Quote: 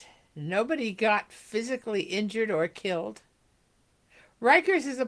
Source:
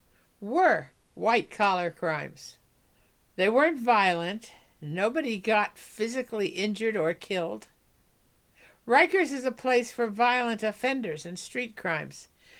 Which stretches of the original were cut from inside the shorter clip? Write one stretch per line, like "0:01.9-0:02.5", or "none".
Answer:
none